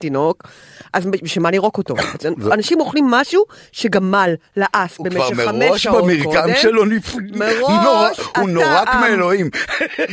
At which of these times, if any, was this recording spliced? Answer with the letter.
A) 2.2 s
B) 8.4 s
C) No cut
A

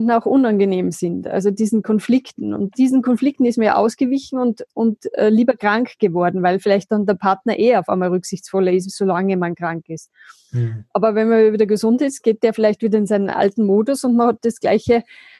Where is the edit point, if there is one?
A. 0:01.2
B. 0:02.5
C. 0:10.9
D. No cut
D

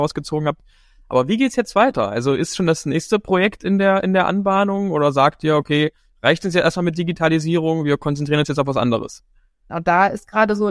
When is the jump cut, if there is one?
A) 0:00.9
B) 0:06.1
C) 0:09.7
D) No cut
C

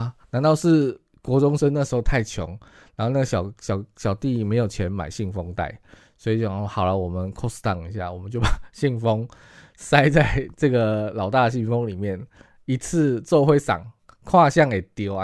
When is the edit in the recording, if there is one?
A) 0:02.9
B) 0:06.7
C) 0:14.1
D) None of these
D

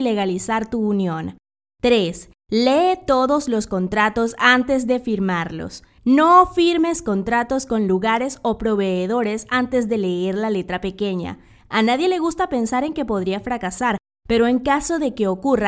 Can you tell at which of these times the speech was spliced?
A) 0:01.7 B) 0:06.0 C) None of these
C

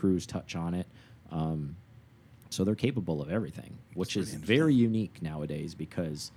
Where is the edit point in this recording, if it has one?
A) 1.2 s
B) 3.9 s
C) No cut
B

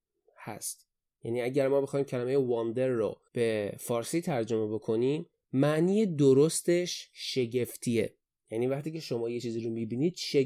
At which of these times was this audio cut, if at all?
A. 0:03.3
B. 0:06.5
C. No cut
A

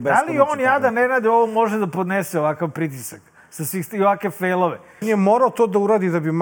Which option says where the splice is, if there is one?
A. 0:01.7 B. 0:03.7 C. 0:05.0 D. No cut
C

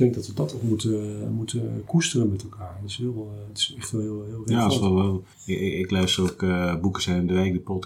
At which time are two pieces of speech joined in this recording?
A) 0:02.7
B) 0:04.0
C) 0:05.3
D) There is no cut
C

